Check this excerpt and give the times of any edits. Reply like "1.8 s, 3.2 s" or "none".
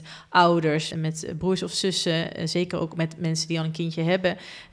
0.9 s